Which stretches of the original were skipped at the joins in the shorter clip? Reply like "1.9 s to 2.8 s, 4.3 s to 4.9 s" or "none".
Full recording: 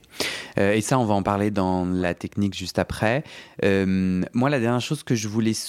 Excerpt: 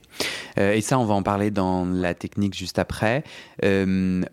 none